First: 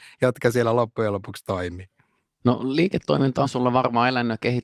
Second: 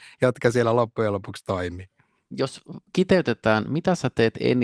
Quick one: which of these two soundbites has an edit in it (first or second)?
second